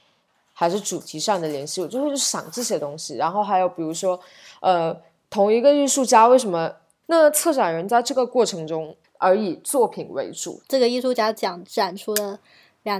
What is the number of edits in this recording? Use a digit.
3